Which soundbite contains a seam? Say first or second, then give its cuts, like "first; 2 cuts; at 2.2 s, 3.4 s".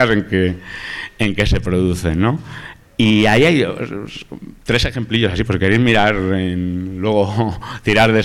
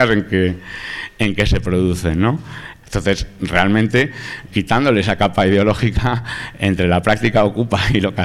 second; 2 cuts; at 2.8 s, 4.5 s